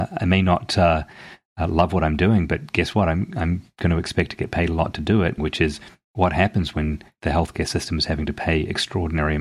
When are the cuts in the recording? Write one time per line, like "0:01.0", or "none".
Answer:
0:05.4

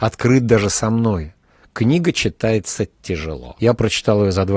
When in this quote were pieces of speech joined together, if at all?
0:01.6
0:03.6

